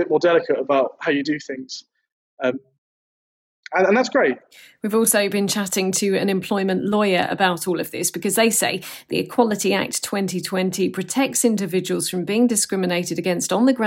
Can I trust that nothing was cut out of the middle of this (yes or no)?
yes